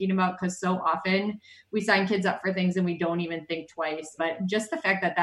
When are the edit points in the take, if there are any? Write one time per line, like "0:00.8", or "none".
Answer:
0:04.2